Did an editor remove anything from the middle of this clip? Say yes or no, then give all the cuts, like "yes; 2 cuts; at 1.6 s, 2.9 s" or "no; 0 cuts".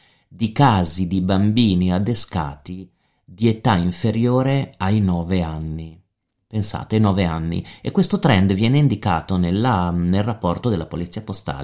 no; 0 cuts